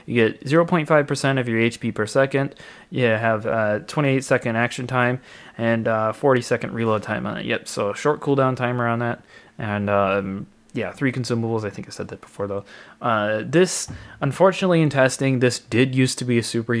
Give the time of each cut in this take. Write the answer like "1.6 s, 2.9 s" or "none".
none